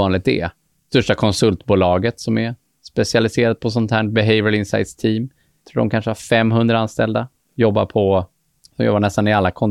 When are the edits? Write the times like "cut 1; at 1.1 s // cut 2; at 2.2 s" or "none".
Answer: none